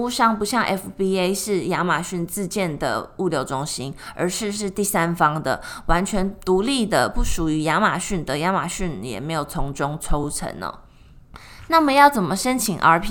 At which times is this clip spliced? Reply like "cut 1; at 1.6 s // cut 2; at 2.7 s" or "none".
none